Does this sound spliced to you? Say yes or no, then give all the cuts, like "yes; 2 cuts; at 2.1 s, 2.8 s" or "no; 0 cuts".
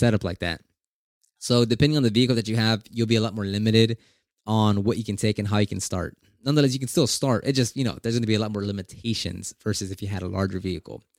no; 0 cuts